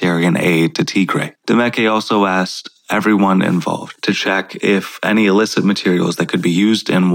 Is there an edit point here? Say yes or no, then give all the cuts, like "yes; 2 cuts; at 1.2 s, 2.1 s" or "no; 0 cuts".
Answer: yes; 1 cut; at 1.3 s